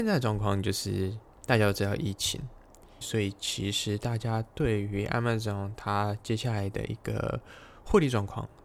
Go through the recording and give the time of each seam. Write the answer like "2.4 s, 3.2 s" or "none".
3.0 s

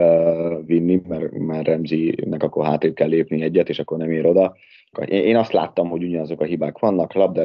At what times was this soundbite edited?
4.9 s

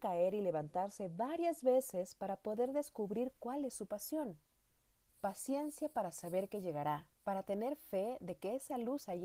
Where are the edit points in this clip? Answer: 5.1 s, 7.2 s

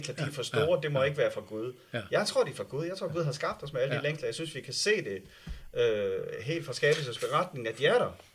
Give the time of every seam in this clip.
none

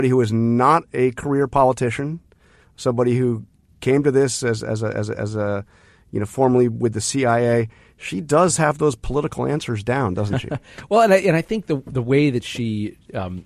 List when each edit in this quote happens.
none

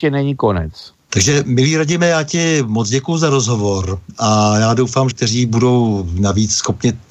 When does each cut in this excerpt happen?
1.1 s, 5.1 s

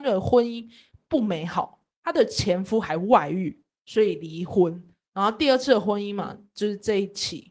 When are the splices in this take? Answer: 1.9 s

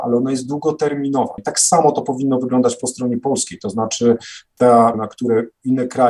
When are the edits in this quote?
1.4 s, 4.9 s

